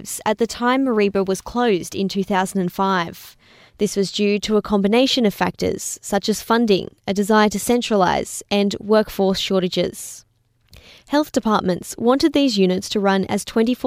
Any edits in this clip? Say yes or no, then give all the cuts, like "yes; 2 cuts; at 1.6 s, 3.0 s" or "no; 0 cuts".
yes; 1 cut; at 3.7 s